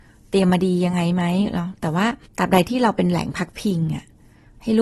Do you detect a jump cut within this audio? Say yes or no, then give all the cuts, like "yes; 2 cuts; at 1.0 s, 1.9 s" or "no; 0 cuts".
yes; 1 cut; at 2.3 s